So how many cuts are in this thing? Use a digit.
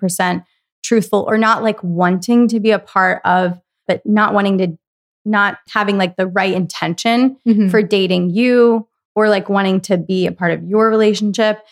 2